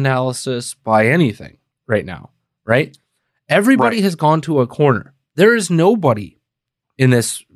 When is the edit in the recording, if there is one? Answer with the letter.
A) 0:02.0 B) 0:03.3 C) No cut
C